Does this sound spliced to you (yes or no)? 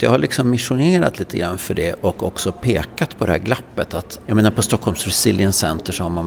yes